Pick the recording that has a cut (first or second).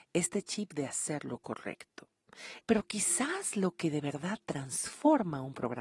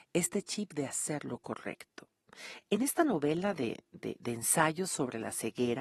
first